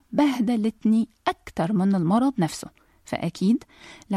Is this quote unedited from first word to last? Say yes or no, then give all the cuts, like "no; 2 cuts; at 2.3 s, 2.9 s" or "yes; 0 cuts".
yes; 0 cuts